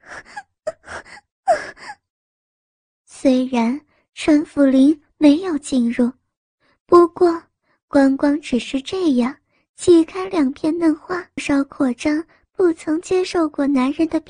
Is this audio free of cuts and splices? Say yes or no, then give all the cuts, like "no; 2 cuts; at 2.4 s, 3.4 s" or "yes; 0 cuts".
no; 1 cut; at 11.4 s